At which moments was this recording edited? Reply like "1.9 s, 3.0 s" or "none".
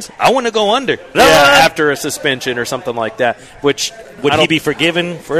1.1 s